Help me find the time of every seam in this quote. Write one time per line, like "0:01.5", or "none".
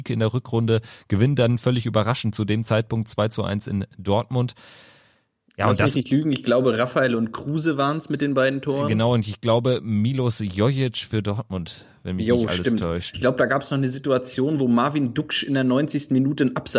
0:13.1

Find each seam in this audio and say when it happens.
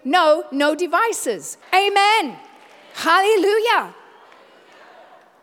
0:01.6

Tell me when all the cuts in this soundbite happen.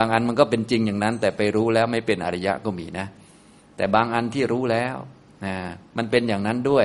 none

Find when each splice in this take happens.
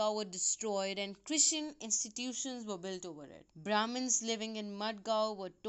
0:03.5

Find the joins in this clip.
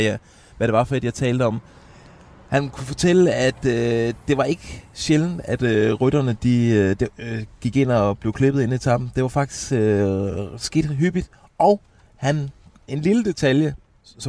none

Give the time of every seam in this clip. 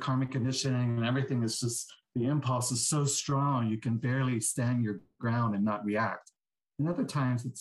none

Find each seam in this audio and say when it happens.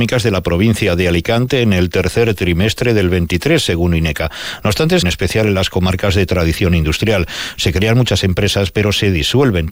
0:05.0

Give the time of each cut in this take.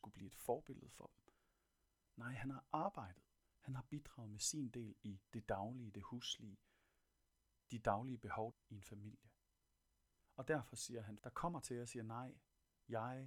0:03.4
0:08.5
0:11.2

